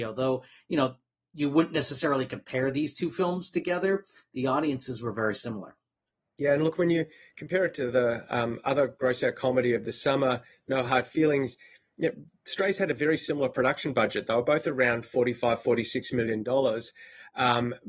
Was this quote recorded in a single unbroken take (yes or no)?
yes